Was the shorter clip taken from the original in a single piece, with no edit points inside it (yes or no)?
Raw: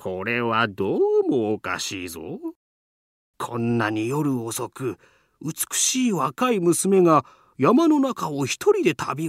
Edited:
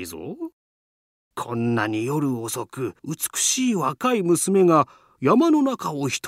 no